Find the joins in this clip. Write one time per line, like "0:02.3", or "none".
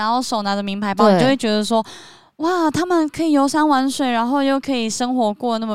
none